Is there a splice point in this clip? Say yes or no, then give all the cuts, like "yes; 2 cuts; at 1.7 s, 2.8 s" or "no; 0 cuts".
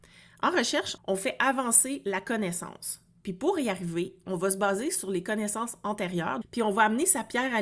yes; 2 cuts; at 1.0 s, 6.4 s